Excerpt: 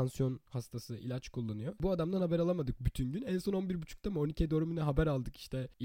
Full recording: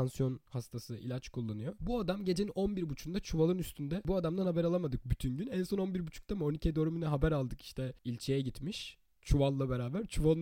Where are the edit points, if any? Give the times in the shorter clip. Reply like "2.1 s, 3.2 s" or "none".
1.8 s